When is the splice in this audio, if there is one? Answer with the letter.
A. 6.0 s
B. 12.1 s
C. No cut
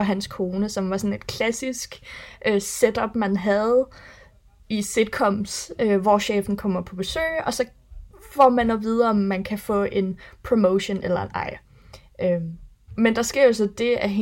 C